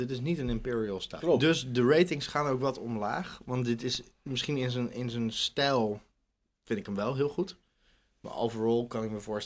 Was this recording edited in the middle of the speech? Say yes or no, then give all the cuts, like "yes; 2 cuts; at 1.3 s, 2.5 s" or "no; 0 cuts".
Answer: yes; 1 cut; at 1.2 s